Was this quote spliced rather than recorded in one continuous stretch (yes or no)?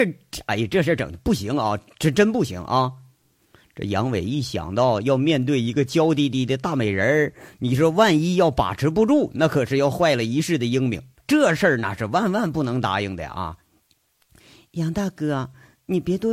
no